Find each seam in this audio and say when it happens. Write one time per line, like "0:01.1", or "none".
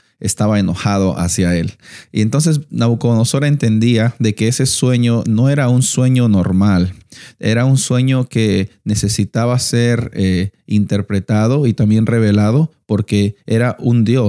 none